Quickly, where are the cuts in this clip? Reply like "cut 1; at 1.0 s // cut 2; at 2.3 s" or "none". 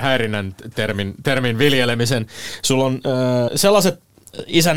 cut 1; at 3.5 s